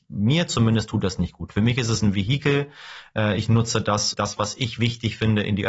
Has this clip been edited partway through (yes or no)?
yes